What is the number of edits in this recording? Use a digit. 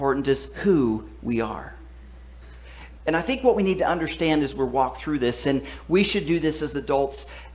1